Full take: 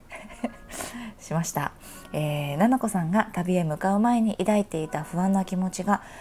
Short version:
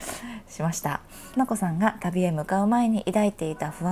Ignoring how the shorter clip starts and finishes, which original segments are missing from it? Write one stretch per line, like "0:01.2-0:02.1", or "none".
0:02.1-0:02.7